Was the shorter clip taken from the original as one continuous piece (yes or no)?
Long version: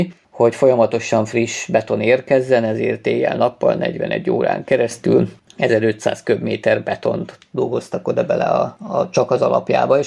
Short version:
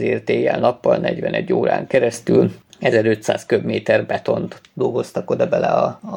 yes